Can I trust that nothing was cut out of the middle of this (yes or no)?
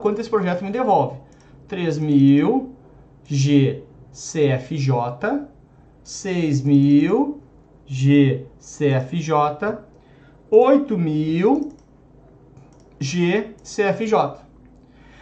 yes